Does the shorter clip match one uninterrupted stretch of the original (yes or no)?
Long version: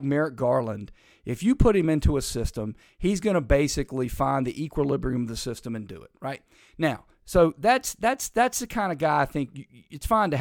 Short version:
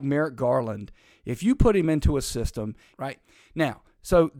no